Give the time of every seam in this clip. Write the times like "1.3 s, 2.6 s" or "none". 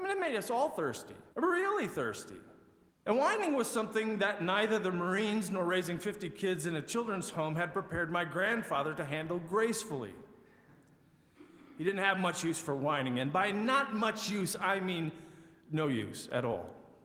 1.3 s, 2.9 s